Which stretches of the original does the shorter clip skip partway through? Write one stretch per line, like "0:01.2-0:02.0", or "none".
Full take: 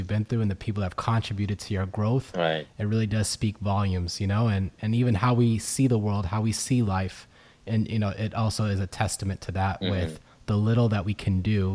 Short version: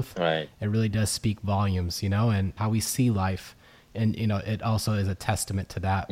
0:04.7-0:06.3